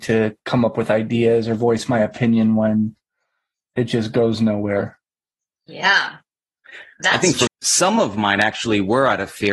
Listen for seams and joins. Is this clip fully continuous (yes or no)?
no